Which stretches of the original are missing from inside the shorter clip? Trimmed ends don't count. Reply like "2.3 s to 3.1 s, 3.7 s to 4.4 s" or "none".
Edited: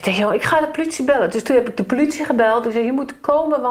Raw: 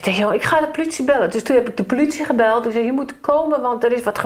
none